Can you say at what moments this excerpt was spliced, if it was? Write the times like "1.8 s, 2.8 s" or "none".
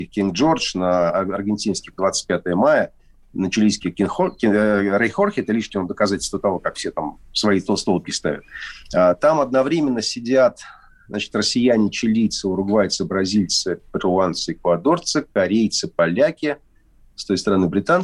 none